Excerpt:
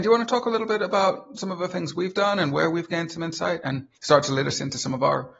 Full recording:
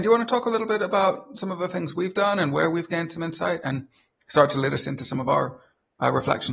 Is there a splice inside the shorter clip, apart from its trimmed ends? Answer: yes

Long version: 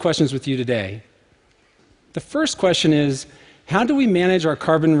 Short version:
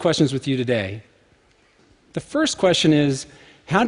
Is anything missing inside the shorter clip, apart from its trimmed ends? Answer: no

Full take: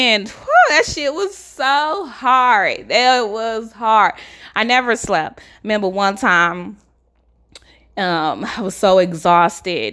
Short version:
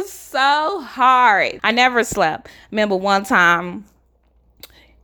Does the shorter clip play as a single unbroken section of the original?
no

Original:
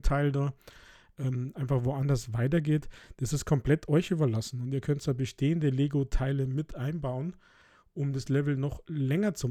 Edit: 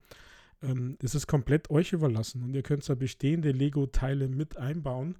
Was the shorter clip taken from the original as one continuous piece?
no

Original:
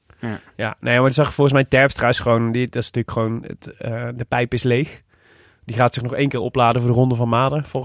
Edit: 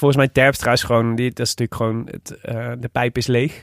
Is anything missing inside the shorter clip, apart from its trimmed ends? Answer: no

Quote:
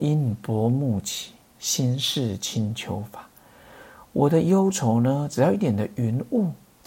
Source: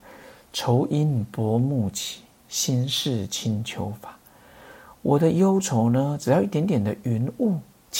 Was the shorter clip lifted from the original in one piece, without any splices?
no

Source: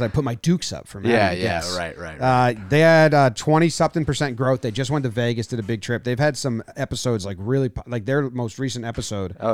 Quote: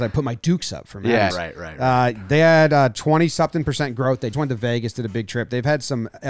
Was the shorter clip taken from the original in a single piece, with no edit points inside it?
no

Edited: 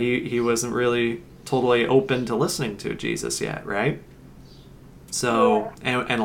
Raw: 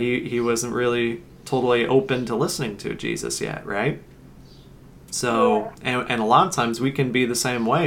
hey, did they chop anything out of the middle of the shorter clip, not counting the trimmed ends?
no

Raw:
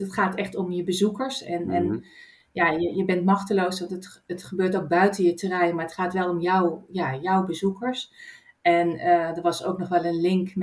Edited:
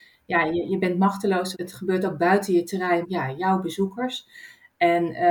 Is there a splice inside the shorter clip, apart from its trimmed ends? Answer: yes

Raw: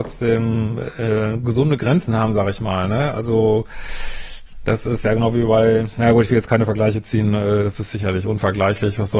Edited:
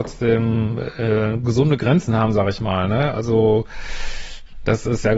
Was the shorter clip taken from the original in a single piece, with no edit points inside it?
yes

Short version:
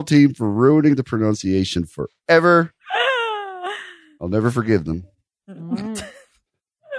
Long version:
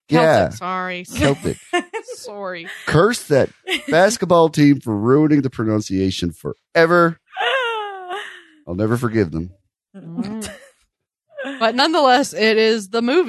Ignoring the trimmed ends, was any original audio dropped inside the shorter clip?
no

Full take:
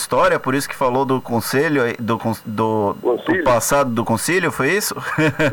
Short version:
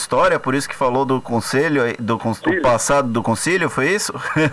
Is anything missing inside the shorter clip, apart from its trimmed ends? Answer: yes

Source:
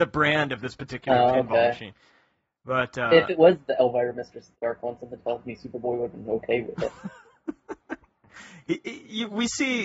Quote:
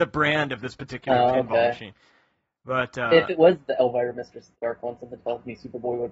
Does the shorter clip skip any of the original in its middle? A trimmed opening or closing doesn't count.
no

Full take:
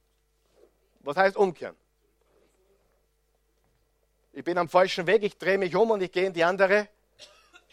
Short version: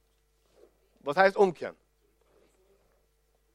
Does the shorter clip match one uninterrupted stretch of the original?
yes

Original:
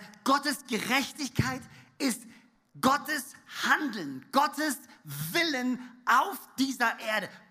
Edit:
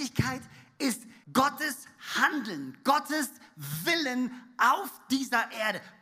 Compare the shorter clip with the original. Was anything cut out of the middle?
yes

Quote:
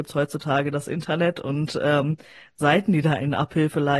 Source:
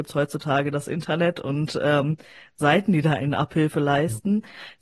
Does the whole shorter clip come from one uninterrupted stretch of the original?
yes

